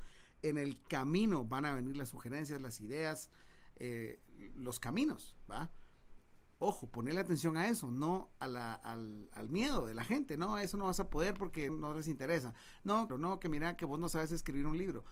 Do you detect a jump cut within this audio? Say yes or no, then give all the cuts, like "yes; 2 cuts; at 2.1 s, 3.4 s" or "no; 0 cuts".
yes; 2 cuts; at 11.7 s, 13.1 s